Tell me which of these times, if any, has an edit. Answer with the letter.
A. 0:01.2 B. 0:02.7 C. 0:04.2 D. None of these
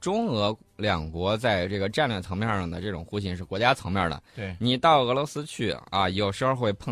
D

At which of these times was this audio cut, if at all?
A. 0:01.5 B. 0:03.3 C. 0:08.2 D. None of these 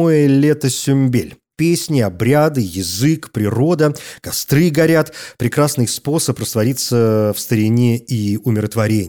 A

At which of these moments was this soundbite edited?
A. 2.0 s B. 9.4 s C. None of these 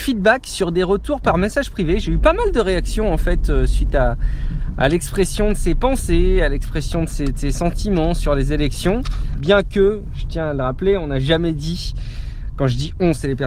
B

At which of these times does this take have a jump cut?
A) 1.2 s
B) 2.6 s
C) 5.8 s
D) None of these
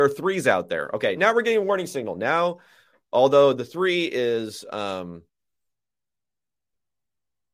A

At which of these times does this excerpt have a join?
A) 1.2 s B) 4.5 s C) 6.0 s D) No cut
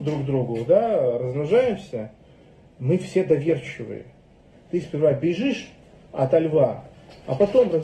B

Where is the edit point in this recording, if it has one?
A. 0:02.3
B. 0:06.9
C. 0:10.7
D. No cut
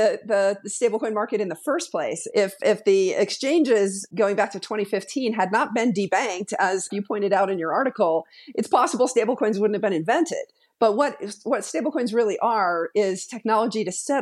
B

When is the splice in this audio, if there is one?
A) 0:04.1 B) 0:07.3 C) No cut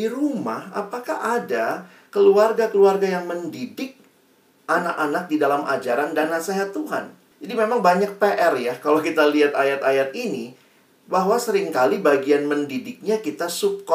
B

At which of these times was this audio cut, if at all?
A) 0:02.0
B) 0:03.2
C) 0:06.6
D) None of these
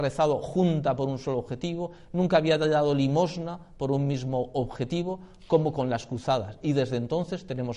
D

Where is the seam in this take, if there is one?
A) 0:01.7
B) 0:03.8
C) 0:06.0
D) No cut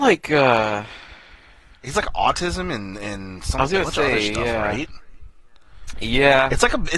D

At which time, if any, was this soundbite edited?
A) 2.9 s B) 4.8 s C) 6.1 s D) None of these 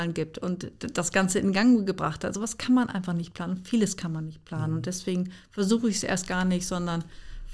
D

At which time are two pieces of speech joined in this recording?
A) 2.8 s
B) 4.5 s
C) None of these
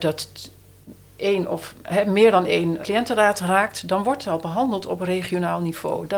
A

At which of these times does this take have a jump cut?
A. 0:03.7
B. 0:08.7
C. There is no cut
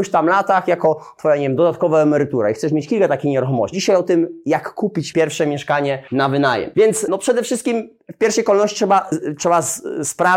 A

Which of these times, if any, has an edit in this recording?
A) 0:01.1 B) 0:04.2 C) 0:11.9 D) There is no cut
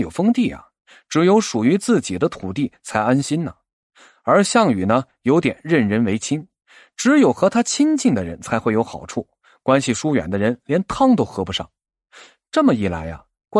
D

